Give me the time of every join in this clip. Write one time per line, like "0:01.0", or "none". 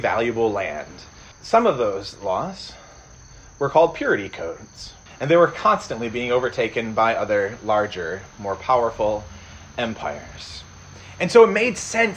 0:01.3
0:05.1